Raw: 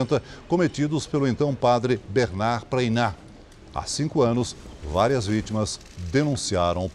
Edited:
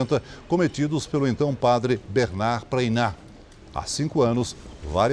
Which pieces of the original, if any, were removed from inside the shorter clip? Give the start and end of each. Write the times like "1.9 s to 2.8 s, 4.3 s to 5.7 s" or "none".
none